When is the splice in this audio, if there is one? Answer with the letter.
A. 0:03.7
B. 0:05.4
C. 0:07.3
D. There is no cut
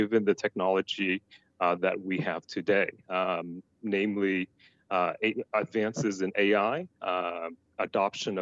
D